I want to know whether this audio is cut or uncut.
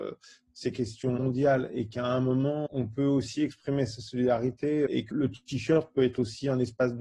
cut